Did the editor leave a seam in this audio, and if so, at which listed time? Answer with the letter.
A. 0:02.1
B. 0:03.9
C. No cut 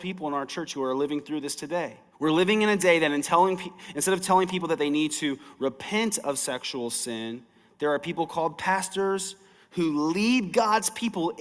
A